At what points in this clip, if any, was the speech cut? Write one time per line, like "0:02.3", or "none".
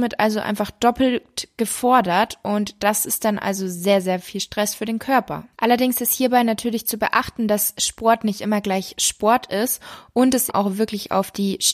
0:05.5
0:10.5